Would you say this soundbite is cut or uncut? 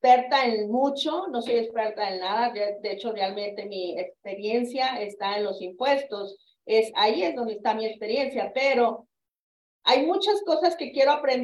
uncut